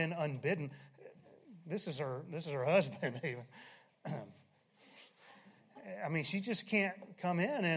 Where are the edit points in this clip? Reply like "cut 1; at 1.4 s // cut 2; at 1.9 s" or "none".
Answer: none